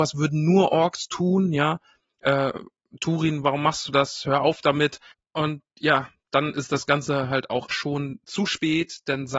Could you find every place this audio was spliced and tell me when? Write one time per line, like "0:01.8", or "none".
0:07.7